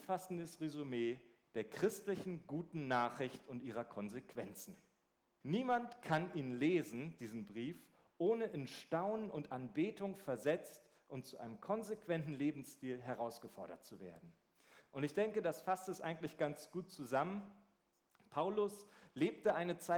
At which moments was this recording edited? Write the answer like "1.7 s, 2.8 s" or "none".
5.4 s